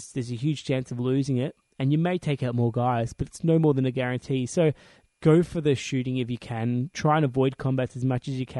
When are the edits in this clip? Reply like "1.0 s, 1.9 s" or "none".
none